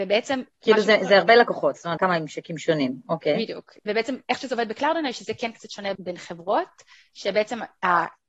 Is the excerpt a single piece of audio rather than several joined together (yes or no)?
no